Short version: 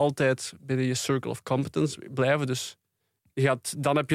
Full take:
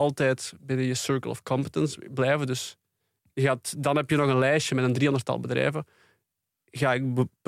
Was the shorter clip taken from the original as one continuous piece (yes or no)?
yes